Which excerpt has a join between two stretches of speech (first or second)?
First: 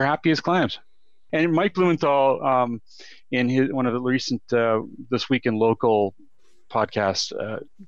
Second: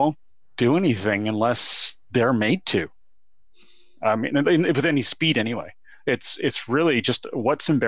first